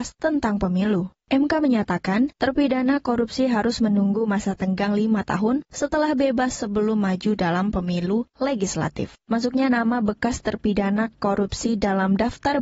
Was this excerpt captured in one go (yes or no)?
no